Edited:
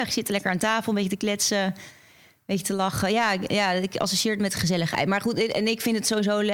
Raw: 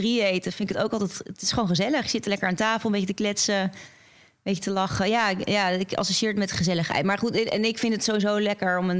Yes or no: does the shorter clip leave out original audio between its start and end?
no